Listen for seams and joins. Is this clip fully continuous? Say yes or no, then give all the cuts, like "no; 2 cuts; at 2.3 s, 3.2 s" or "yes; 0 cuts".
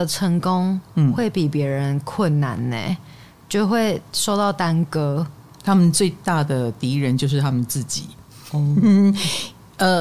yes; 0 cuts